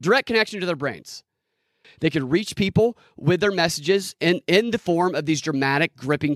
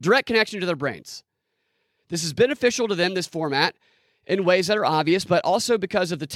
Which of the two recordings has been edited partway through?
first; 1 cut; at 1.8 s

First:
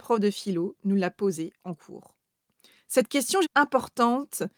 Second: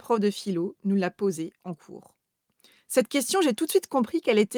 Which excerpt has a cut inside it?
first; 1 cut; at 3.4 s

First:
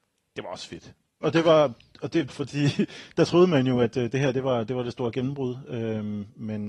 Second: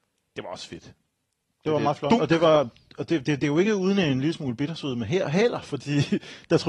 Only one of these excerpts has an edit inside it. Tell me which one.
first; 2 cuts; at 1.2 s, 2.3 s

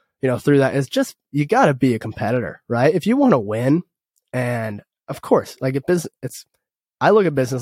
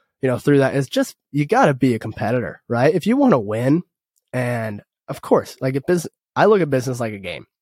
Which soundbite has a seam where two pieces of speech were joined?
second; 1 cut; at 6.2 s

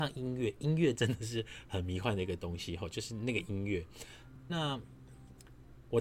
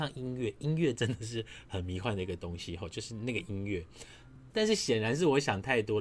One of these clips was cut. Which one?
second; 1 cut; at 4.5 s

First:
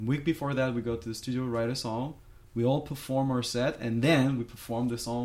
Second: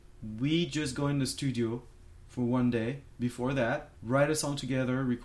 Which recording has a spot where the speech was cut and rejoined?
second; 1 cut; at 4.0 s

